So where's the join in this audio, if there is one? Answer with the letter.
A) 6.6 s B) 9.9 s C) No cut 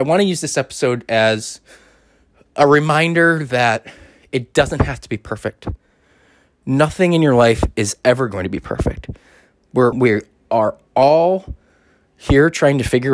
B